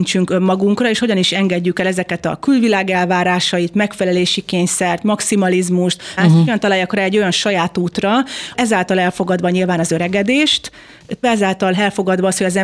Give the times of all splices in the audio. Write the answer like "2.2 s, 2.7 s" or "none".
6.2 s, 8.5 s, 11.2 s